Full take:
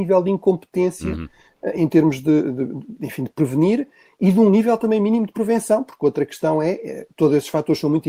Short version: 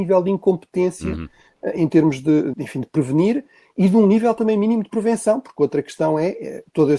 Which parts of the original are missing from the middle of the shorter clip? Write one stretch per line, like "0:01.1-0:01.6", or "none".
0:02.5-0:03.0